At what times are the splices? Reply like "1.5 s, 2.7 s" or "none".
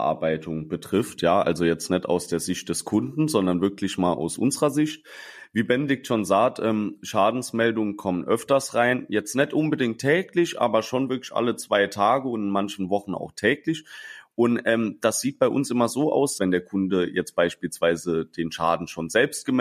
16.4 s